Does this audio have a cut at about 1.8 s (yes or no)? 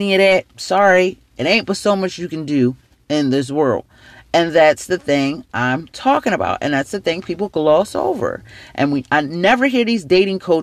no